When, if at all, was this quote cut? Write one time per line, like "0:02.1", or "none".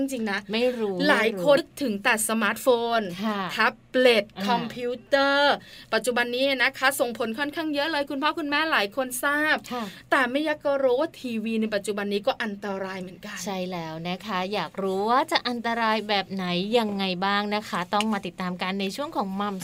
0:01.6